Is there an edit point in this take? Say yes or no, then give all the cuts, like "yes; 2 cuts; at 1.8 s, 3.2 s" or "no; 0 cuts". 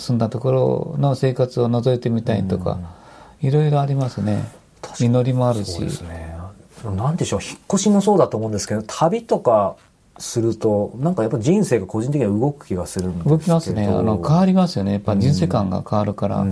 no; 0 cuts